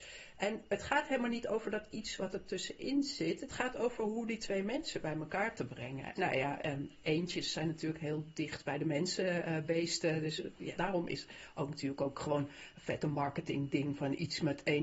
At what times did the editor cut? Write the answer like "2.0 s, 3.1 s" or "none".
6.2 s, 10.7 s